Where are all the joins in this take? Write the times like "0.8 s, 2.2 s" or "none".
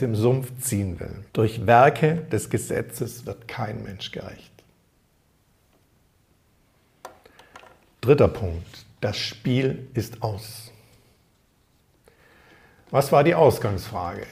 1.3 s